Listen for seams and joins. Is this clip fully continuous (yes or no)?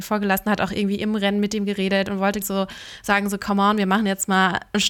no